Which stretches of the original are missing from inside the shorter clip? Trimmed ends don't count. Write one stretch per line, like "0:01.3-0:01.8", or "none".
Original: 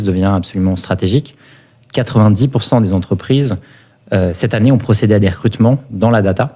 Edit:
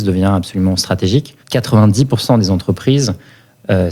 0:01.4-0:01.8